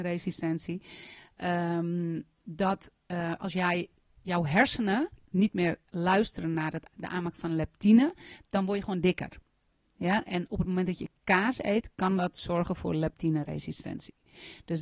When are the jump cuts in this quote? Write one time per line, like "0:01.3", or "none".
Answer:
none